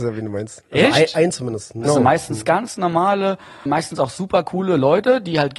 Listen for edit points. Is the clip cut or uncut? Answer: cut